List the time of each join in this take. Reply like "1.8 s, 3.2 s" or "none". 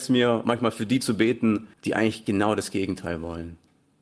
1.7 s